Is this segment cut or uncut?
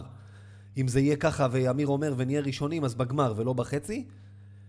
uncut